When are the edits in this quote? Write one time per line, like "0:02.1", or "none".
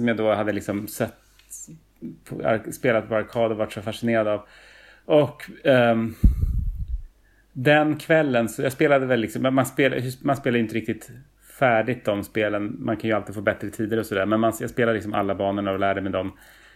none